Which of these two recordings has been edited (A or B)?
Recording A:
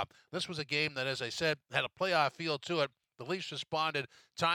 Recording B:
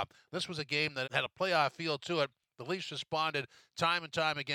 B